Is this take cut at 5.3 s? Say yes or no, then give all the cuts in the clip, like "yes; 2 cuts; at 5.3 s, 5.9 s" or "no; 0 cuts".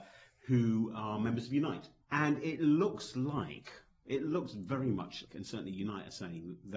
yes; 2 cuts; at 2.0 s, 5.3 s